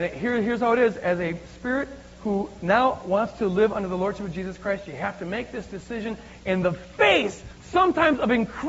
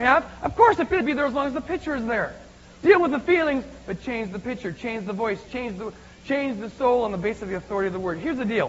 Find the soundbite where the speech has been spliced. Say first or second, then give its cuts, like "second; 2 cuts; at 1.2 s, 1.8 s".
second; 1 cut; at 5.5 s